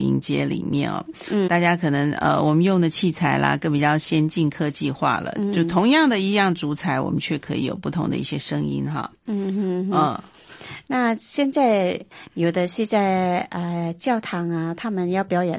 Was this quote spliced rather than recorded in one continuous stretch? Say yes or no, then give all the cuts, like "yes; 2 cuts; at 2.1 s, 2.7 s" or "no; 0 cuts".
yes; 1 cut; at 1.5 s